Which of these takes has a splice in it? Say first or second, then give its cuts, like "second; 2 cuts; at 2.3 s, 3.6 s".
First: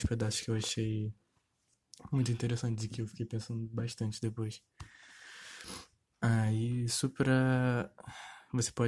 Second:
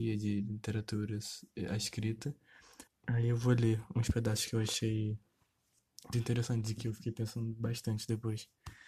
second; 2 cuts; at 2.9 s, 6.1 s